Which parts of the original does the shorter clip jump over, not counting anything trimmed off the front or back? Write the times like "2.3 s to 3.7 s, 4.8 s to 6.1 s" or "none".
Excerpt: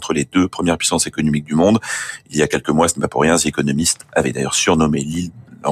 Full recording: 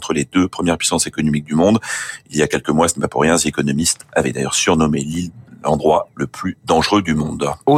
none